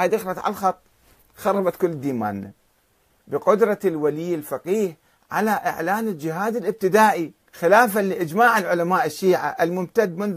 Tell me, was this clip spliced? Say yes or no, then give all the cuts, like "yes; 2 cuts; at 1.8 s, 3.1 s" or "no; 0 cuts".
yes; 2 cuts; at 3.2 s, 7.4 s